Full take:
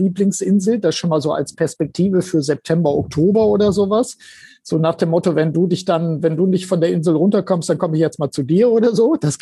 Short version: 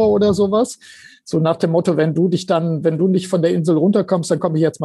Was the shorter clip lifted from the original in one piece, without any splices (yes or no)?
yes